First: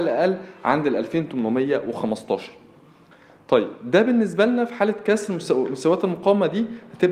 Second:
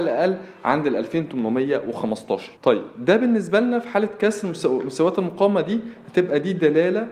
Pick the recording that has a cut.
second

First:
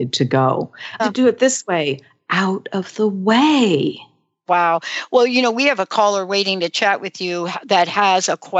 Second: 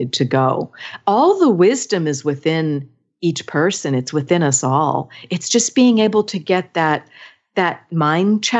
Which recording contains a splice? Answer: first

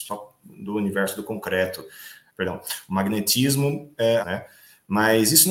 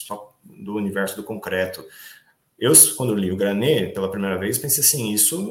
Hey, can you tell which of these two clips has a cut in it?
first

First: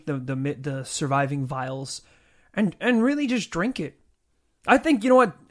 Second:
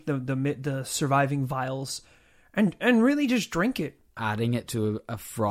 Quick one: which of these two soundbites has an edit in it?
second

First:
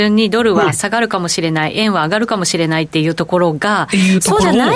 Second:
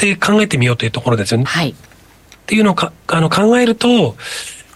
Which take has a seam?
second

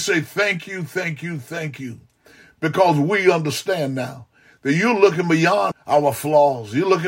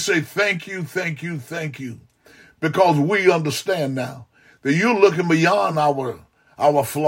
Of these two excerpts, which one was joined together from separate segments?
first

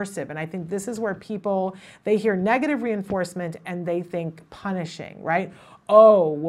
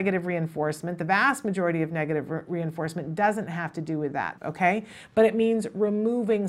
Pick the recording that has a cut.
second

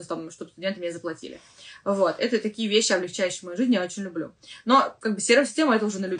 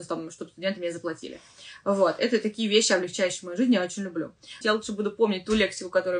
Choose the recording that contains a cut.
second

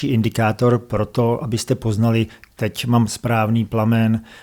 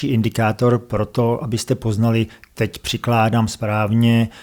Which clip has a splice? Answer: first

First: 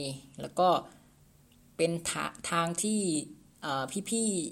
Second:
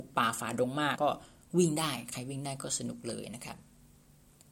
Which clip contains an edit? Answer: second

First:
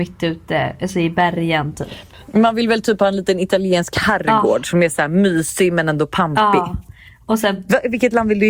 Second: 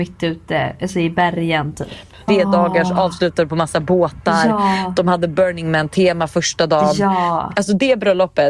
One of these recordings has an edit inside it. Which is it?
second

